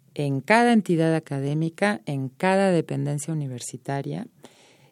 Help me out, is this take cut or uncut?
uncut